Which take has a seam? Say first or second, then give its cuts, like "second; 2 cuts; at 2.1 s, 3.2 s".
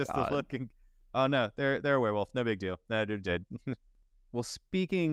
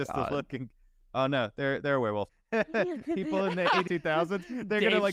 second; 2 cuts; at 2.3 s, 3.9 s